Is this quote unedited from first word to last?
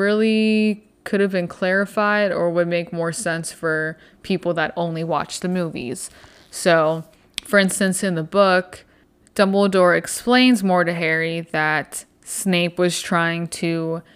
yes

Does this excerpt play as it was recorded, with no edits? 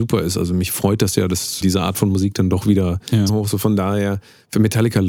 no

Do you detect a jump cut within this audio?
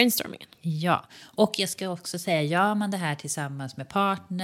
no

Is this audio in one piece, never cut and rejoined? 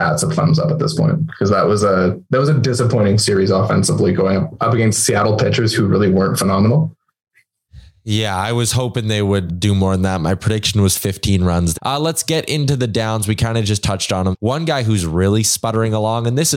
no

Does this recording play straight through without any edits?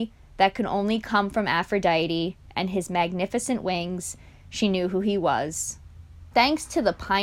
no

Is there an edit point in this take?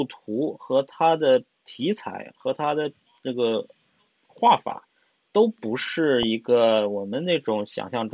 no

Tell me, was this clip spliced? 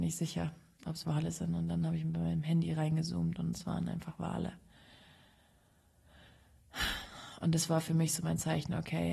yes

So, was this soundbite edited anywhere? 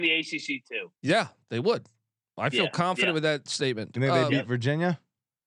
yes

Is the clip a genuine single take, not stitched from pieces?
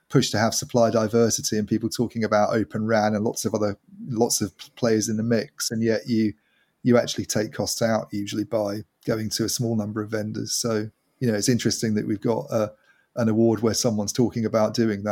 yes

